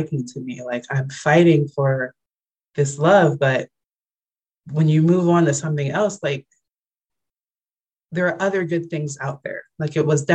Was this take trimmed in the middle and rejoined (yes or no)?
no